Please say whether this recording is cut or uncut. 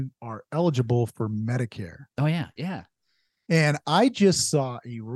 cut